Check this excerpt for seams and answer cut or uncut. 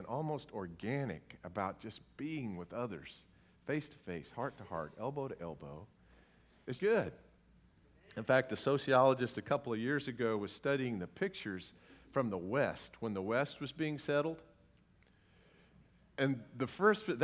cut